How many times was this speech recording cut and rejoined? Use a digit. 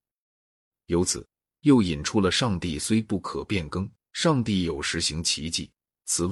1